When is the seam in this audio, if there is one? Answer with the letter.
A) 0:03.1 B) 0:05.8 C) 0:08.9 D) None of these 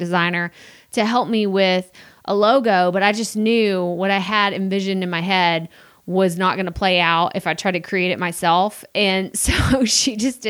D